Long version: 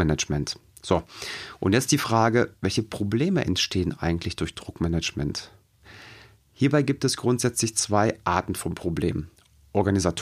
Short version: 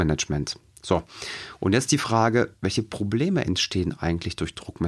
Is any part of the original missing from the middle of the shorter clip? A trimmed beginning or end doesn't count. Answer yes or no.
no